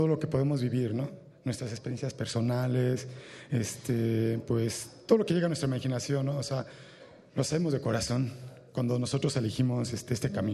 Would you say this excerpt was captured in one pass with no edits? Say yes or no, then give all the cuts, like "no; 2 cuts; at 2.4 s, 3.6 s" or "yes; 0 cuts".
yes; 0 cuts